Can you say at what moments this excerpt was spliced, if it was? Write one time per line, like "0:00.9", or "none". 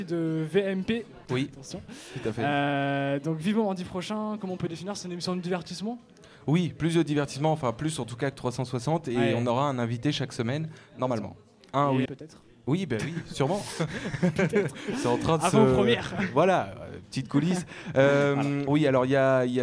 0:01.3
0:12.1
0:18.7